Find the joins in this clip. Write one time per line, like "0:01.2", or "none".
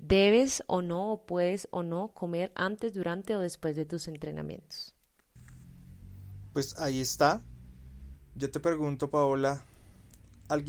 0:08.1